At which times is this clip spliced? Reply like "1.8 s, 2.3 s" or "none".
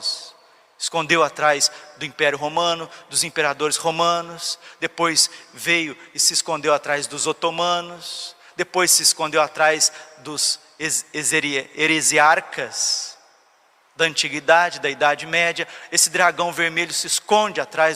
none